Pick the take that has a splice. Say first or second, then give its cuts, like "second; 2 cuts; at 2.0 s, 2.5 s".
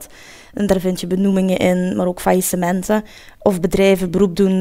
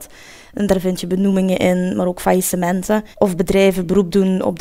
second; 1 cut; at 3.1 s